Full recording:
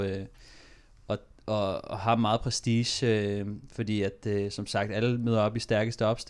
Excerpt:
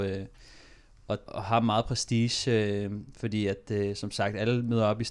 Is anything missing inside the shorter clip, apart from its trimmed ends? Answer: yes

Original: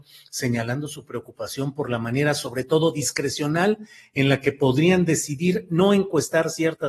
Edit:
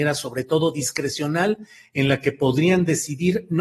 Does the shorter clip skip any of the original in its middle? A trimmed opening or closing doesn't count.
no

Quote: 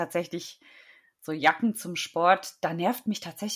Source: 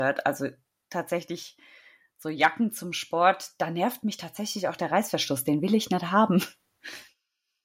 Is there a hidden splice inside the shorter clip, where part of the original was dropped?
no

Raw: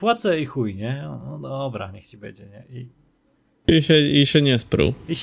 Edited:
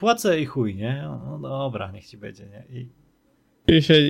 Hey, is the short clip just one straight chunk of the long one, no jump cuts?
yes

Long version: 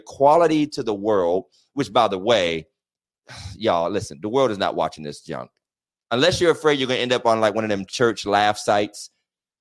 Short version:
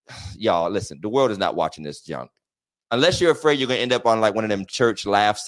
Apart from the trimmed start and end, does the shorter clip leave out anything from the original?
no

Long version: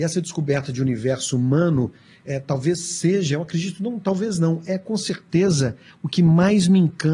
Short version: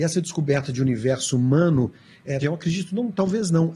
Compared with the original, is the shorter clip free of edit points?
no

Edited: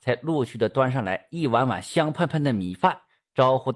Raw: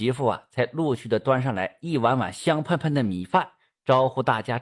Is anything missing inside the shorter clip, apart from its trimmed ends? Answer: no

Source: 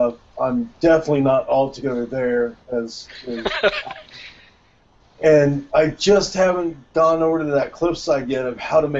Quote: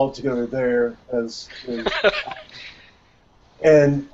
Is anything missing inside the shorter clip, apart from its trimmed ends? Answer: no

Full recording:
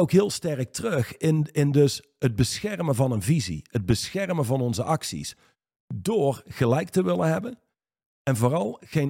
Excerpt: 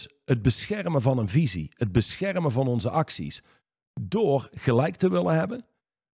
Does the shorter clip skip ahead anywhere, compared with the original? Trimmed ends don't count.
no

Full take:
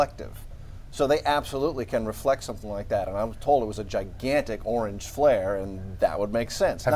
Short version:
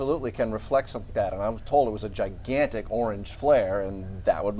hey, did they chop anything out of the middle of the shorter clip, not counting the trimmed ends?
yes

